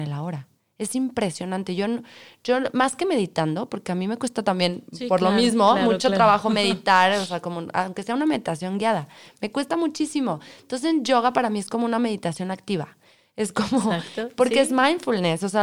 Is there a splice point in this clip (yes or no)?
no